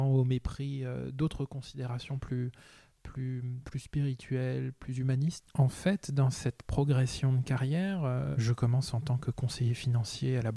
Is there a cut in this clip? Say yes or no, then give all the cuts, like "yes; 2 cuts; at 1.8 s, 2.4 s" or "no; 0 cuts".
no; 0 cuts